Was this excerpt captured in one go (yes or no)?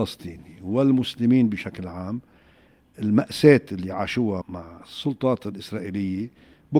no